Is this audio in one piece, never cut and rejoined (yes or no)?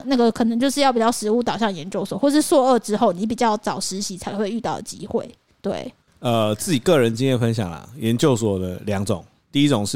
yes